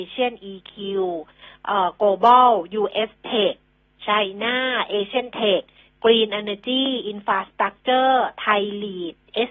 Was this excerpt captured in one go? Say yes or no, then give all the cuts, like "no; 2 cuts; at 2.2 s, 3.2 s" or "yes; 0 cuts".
yes; 0 cuts